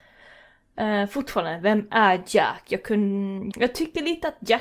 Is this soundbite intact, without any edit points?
no; 1 cut; at 3.5 s

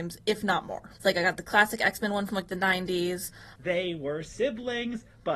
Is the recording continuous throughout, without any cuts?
no; 2 cuts; at 1.0 s, 3.6 s

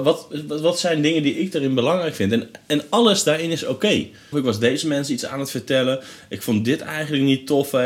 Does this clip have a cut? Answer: yes; 1 cut; at 4.3 s

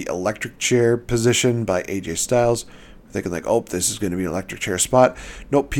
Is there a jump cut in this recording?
no; 0 cuts

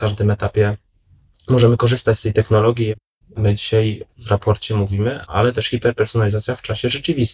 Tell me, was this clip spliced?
yes; 2 cuts; at 3.2 s, 5.3 s

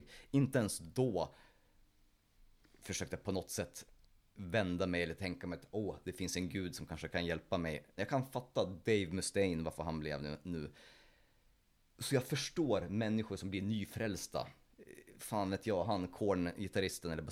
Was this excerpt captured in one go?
no; 1 cut; at 8.0 s

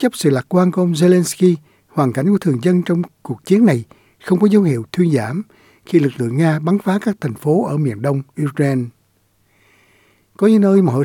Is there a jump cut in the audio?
no; 0 cuts

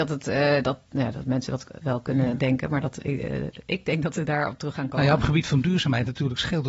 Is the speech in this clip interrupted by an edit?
no; 0 cuts

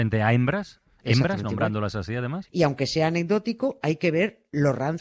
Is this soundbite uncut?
no; 1 cut; at 2.5 s

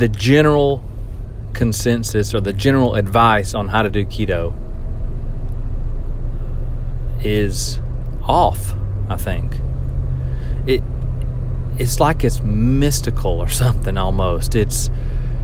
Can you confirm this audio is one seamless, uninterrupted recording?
yes; 0 cuts

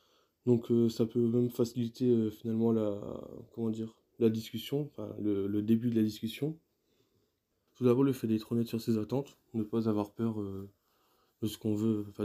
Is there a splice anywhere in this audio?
yes; 1 cut; at 7.7 s

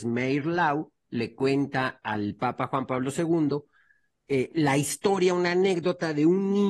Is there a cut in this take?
no; 0 cuts

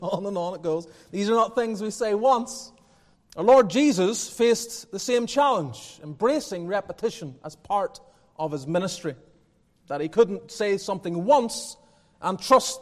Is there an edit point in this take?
yes; 1 cut; at 3.1 s

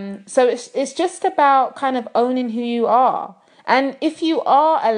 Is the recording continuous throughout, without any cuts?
yes; 0 cuts

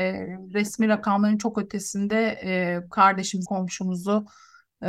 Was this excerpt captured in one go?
no; 1 cut; at 3.4 s

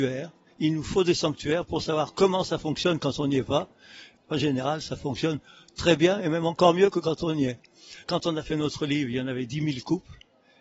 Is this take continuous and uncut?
no; 2 cuts; at 4.2 s, 8.0 s

